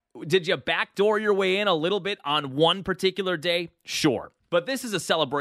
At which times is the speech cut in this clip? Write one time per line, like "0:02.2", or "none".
none